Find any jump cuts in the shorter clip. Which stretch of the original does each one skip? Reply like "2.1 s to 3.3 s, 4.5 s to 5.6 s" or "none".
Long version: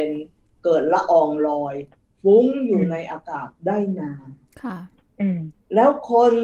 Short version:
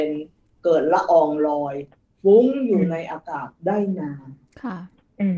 none